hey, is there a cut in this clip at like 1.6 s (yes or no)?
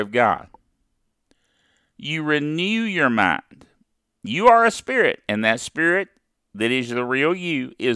no